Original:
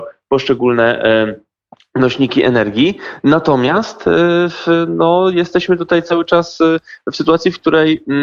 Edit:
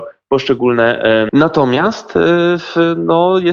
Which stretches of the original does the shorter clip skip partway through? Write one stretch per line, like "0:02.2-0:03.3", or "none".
0:01.3-0:03.2